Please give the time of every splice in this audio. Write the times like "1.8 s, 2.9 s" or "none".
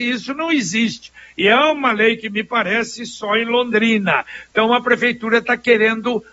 none